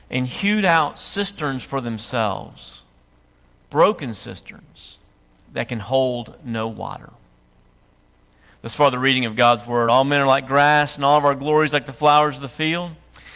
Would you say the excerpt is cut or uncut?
uncut